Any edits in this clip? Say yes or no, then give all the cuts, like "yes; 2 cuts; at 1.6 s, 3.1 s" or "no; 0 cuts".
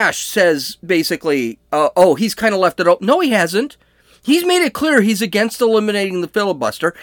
no; 0 cuts